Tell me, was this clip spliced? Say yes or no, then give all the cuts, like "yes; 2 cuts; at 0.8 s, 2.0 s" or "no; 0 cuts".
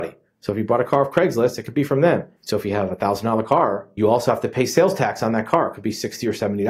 yes; 1 cut; at 2.4 s